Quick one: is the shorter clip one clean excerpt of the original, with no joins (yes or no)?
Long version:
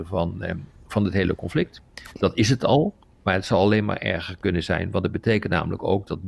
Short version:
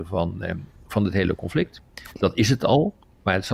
yes